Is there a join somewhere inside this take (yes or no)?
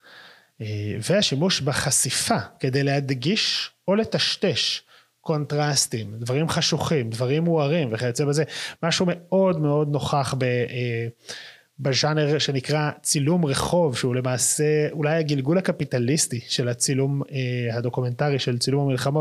no